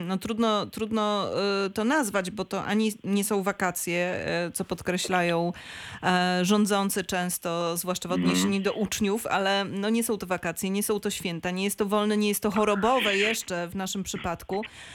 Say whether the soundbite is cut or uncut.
uncut